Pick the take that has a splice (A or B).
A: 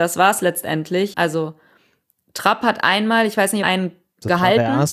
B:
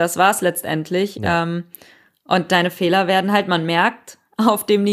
A